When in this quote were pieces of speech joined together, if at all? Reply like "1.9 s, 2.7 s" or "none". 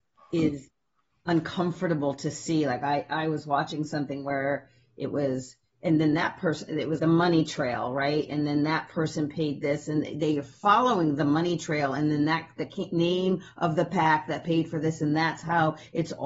7.0 s